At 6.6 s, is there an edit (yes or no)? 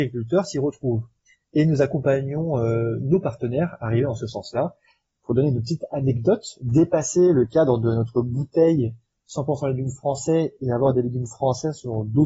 yes